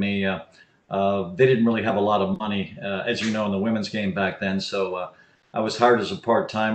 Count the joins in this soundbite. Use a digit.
0